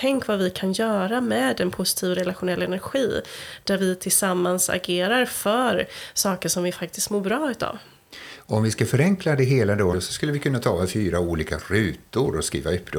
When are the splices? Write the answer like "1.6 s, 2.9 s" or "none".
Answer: 9.9 s